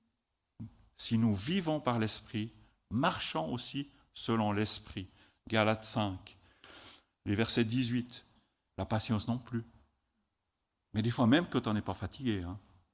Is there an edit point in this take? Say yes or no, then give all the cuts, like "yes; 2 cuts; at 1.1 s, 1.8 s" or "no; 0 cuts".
yes; 1 cut; at 8.7 s